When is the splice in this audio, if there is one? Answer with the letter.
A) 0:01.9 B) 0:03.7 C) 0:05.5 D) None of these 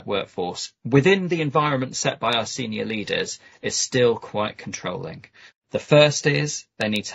C